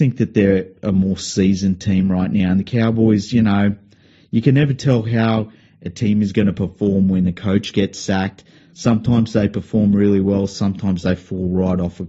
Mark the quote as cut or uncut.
uncut